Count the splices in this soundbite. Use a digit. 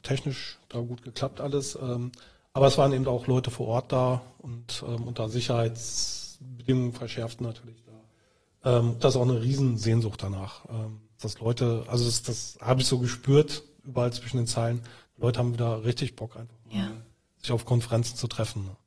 2